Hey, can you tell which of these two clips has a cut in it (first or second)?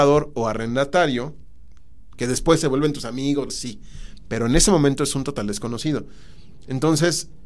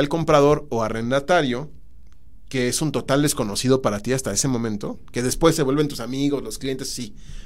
first